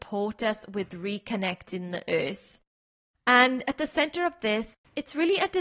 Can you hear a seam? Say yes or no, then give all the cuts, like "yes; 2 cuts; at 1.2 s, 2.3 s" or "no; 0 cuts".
no; 0 cuts